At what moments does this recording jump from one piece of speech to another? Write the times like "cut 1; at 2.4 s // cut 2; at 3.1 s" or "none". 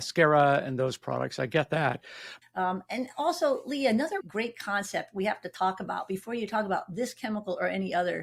cut 1; at 2.4 s // cut 2; at 4.2 s